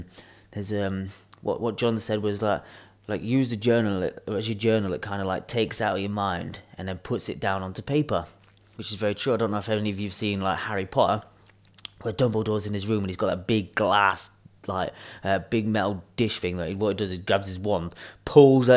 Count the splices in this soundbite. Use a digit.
0